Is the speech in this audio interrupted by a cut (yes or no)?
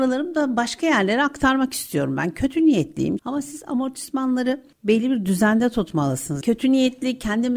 yes